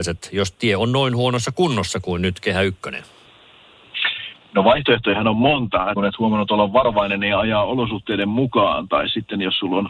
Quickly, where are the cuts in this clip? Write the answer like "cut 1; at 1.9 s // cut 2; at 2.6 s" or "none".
cut 1; at 5.9 s